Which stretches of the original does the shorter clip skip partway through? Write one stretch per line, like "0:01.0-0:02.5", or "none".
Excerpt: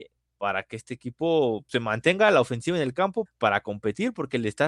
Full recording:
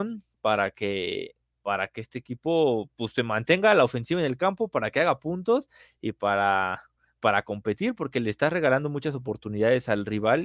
0:02.9-0:03.1
0:04.7-0:07.1